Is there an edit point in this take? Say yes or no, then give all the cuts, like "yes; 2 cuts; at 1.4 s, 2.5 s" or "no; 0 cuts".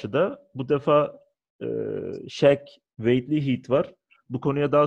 no; 0 cuts